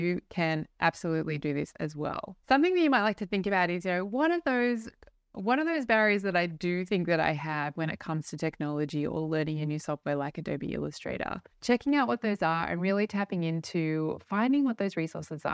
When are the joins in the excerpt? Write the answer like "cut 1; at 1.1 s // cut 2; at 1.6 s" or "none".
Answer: cut 1; at 2.4 s // cut 2; at 11.5 s